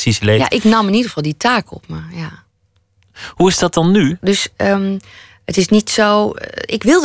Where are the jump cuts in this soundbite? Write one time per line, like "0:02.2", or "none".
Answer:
0:04.2